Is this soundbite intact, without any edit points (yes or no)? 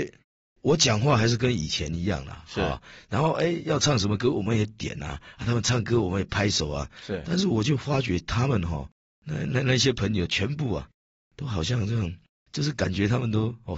yes